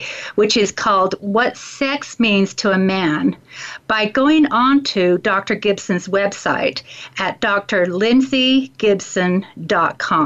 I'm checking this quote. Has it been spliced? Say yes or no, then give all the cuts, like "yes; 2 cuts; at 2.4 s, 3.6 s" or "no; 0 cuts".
no; 0 cuts